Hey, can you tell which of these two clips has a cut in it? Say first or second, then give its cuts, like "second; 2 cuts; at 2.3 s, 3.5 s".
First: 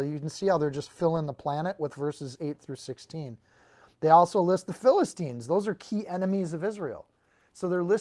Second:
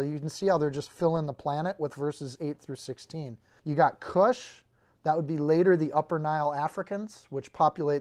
second; 1 cut; at 3.6 s